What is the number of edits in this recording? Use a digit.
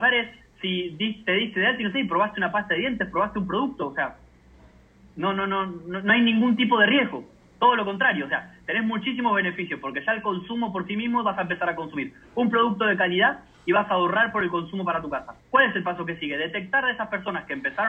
1